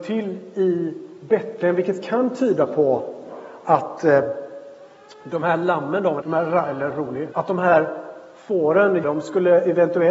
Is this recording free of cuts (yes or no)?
no